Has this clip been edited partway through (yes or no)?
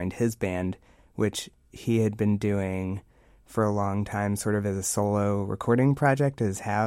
no